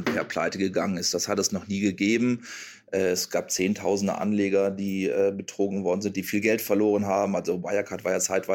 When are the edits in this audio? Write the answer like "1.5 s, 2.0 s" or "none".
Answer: none